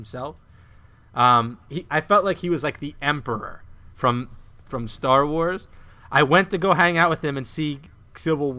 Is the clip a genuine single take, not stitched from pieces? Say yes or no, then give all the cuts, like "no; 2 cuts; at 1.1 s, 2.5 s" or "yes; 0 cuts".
no; 1 cut; at 1.7 s